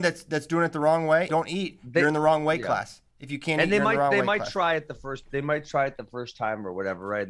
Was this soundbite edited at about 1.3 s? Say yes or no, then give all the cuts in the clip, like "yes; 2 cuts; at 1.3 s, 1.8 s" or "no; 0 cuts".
yes; 1 cut; at 1.3 s